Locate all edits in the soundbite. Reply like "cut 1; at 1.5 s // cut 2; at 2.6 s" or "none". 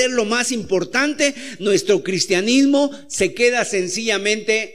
none